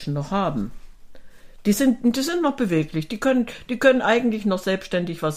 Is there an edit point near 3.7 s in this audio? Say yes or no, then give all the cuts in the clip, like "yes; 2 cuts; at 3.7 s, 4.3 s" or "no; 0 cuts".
no; 0 cuts